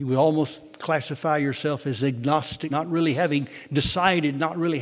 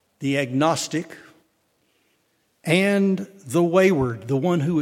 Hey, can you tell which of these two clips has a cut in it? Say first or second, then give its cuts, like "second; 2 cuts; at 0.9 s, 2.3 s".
first; 1 cut; at 2.7 s